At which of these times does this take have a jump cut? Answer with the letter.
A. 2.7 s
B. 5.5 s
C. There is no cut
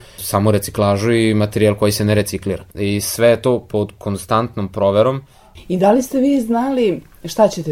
A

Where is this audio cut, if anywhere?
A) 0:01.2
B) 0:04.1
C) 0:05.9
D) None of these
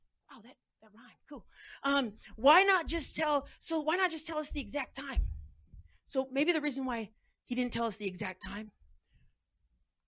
D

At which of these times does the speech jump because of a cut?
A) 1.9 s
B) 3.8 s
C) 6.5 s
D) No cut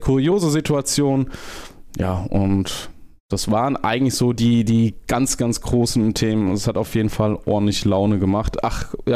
D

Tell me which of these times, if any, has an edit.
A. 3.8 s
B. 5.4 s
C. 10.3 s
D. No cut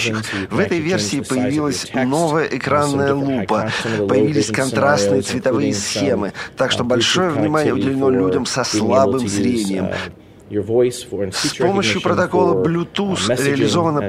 A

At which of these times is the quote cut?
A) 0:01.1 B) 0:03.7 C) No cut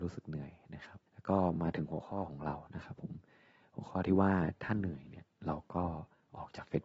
A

